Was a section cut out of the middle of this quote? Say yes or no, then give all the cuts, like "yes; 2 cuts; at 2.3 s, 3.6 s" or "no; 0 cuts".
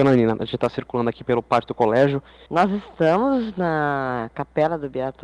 yes; 1 cut; at 2.5 s